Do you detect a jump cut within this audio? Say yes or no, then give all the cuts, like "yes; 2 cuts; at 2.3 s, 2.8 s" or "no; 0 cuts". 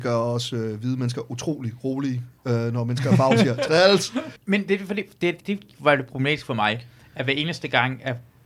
yes; 2 cuts; at 4.4 s, 5.4 s